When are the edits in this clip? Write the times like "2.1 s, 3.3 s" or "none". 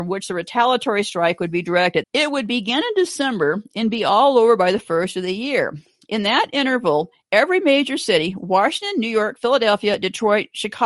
2.0 s